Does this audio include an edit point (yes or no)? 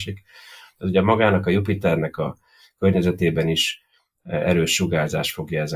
no